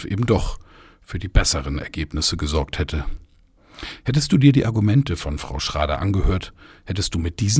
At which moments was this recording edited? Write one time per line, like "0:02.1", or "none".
none